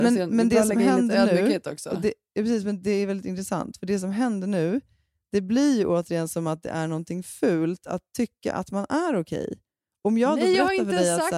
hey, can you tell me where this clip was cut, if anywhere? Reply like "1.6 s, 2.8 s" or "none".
none